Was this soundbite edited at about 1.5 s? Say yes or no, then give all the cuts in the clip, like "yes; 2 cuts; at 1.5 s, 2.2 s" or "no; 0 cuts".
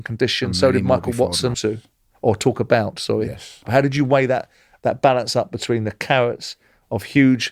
yes; 2 cuts; at 1.5 s, 3.7 s